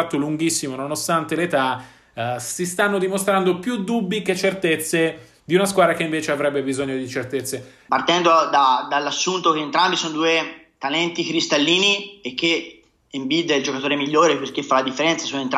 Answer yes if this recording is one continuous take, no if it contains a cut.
no